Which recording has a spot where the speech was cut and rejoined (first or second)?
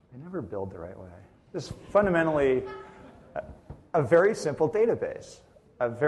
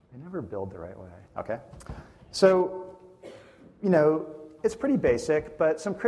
second